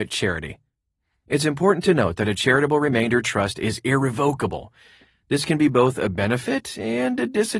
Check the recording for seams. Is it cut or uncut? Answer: uncut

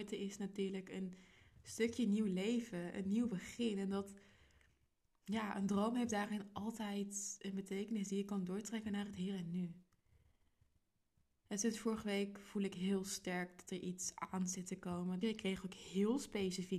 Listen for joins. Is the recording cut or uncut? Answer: cut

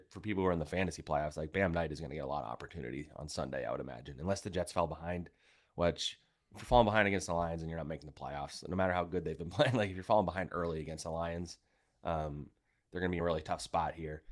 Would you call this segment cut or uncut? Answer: uncut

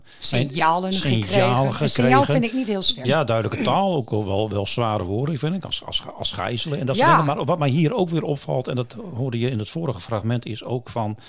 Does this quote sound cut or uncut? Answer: cut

